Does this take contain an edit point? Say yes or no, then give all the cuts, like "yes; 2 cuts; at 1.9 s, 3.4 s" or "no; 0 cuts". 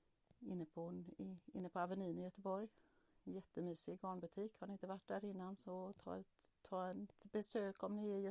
no; 0 cuts